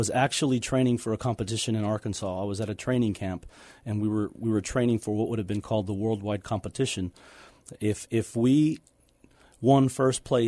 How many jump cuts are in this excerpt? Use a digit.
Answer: 0